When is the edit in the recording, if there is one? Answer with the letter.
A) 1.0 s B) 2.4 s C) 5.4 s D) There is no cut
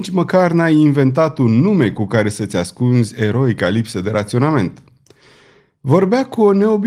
D